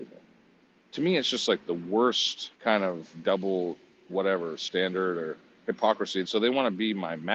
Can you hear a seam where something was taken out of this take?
yes; 2 cuts; at 2.5 s, 6.2 s

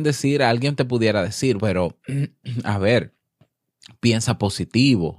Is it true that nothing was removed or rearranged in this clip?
no; 1 cut; at 1.6 s

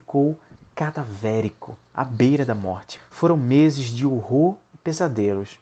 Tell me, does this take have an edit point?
no; 0 cuts

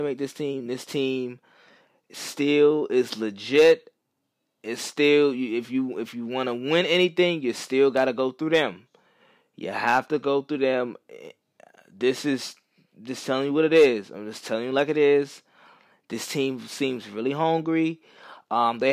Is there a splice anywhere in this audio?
no; 0 cuts

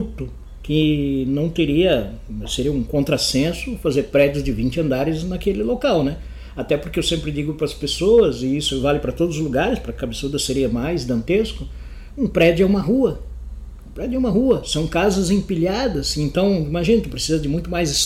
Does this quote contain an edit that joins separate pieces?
no; 0 cuts

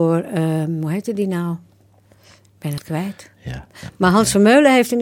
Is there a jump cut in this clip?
no; 0 cuts

